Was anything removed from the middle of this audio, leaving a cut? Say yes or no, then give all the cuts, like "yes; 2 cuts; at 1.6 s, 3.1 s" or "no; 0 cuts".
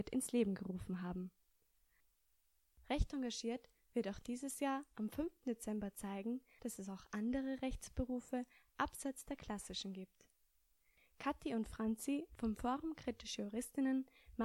yes; 1 cut; at 11.0 s